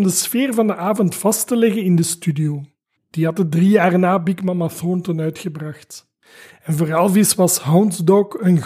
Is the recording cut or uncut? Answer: cut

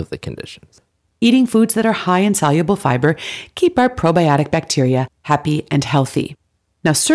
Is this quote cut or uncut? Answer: cut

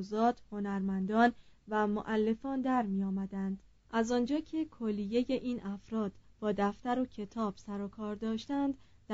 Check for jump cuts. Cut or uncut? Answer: cut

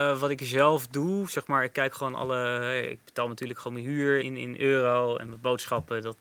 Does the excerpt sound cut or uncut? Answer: cut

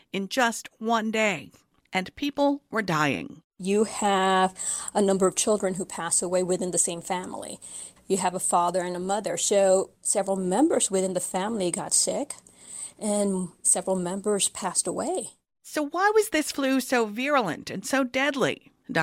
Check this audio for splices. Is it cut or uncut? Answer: cut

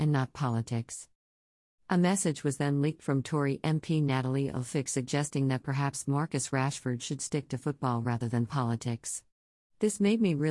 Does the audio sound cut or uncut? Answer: uncut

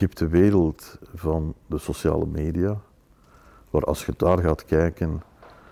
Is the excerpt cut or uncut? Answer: uncut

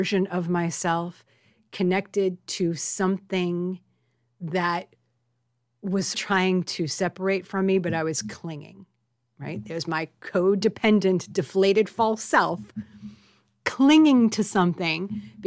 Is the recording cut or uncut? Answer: cut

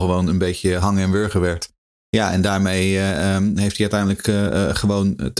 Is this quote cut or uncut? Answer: uncut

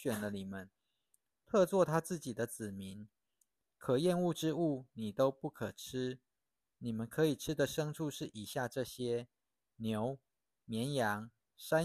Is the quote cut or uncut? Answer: uncut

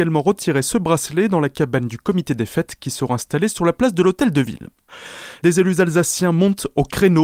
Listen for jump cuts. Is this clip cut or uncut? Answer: uncut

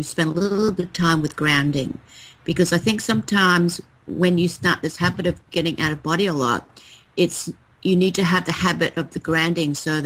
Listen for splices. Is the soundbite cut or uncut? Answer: uncut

